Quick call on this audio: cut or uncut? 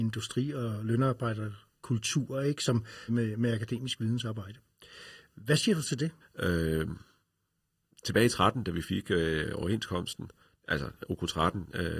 cut